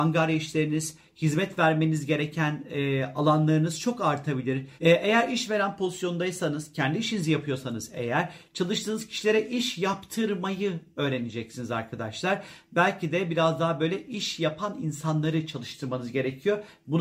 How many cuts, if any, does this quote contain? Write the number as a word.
one